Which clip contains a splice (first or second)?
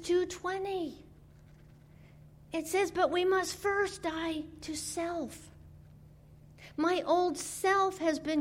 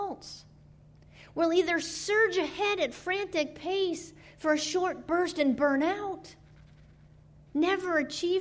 second